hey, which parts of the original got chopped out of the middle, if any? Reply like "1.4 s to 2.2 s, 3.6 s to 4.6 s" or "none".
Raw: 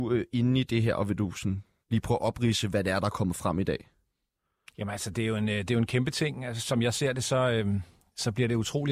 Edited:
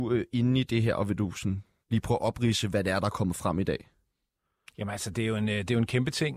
none